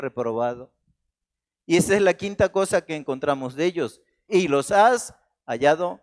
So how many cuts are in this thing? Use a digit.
1